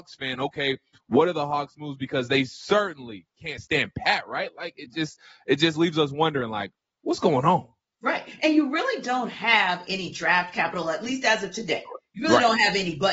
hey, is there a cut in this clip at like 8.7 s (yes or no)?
no